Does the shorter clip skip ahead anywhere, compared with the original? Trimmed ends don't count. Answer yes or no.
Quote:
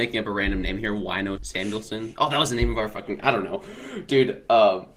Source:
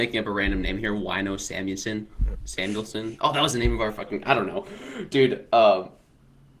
yes